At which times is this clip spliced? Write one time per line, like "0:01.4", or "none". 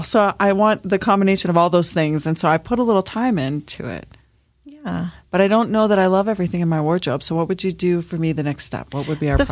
none